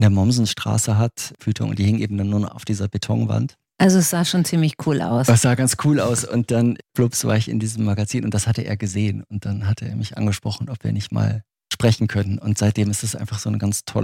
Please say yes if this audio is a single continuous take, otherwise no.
no